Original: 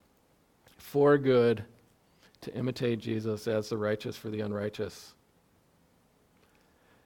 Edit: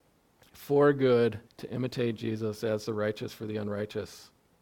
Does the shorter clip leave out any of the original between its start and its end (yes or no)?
yes